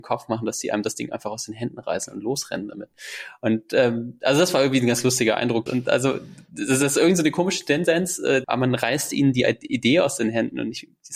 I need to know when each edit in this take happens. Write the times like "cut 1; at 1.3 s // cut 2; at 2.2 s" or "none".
cut 1; at 5.7 s // cut 2; at 8.4 s